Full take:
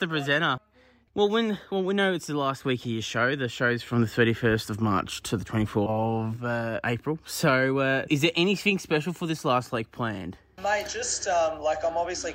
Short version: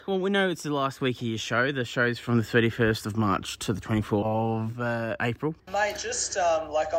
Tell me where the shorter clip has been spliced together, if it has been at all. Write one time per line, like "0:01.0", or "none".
0:05.6